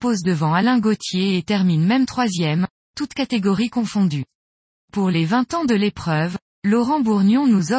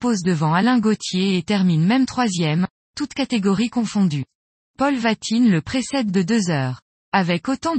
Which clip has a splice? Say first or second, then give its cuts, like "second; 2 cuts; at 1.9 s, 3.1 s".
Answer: second; 1 cut; at 4.7 s